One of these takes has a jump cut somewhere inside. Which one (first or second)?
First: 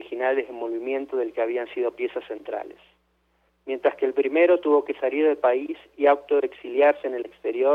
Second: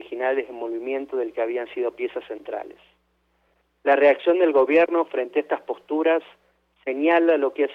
first